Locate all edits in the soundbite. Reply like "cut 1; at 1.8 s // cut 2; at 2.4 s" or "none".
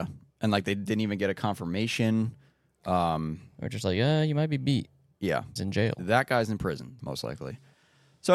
cut 1; at 5.6 s // cut 2; at 7.0 s